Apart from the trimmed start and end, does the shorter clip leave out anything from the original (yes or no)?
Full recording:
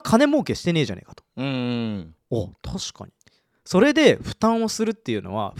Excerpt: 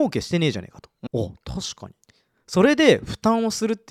yes